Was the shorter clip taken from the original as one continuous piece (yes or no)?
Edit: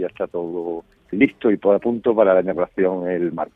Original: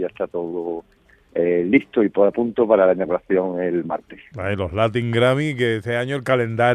no